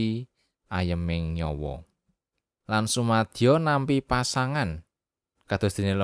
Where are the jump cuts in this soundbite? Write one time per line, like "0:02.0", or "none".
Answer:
0:02.6